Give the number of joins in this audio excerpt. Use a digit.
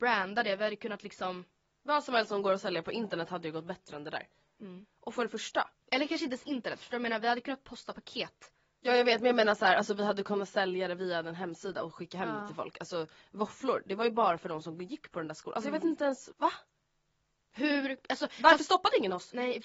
1